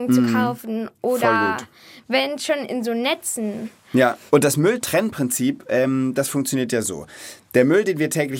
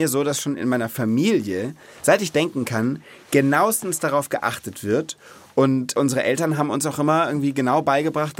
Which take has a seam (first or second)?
first